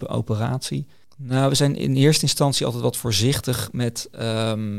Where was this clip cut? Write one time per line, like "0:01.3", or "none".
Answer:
0:01.0